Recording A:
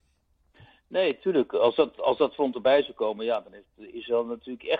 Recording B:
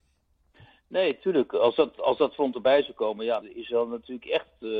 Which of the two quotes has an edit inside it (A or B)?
B